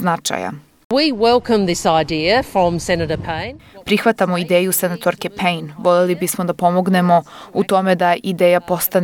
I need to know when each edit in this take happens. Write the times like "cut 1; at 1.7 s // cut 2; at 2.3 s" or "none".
none